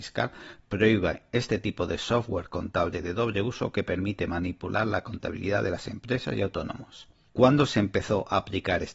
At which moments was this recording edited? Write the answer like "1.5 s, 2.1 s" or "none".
none

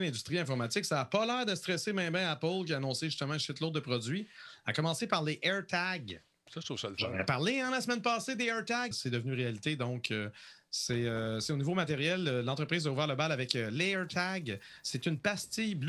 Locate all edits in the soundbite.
8.9 s

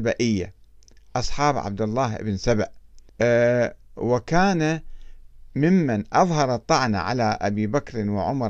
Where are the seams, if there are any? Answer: 3.1 s

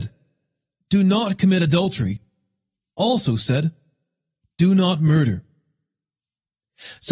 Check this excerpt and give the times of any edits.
none

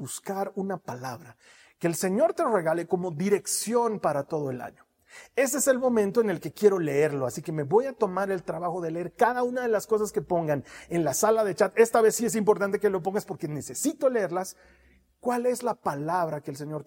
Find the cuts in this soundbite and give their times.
none

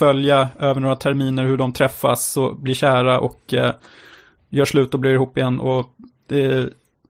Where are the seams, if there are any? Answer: none

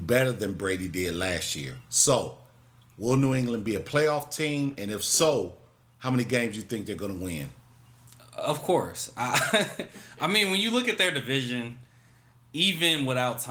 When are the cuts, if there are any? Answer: none

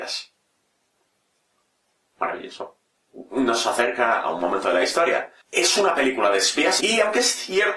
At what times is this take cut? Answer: 5.4 s, 6.8 s

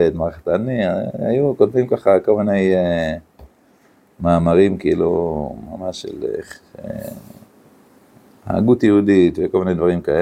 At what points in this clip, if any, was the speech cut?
none

